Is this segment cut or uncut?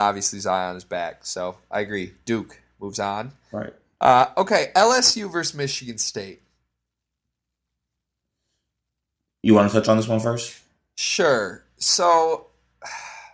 uncut